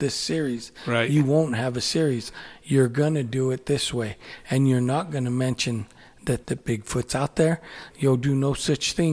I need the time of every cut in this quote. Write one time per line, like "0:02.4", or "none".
0:06.4
0:07.9